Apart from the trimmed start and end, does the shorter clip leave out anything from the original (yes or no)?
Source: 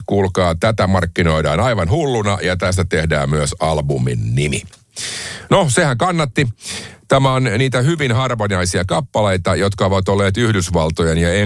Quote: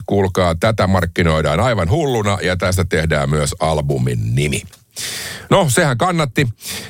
no